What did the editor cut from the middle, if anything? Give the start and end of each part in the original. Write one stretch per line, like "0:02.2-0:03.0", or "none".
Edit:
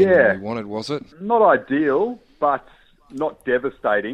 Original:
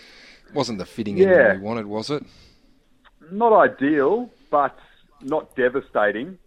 0:02.3-0:03.2